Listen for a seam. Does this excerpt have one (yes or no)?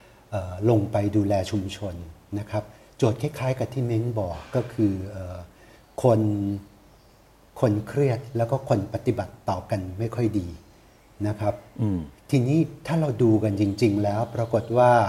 no